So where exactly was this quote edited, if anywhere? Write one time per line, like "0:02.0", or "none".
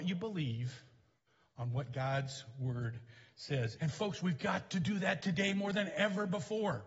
0:03.8